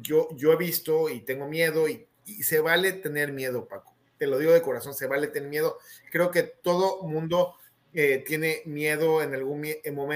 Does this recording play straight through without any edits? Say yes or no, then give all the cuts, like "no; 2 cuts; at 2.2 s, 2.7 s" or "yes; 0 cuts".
yes; 0 cuts